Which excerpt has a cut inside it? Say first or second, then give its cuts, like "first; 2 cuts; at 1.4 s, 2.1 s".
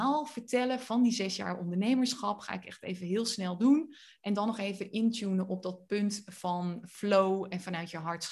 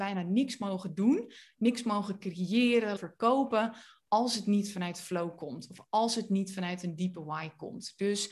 second; 1 cut; at 3.0 s